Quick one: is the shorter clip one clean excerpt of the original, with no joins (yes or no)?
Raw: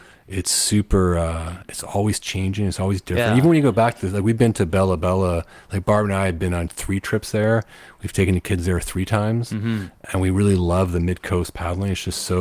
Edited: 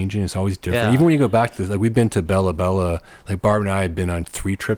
yes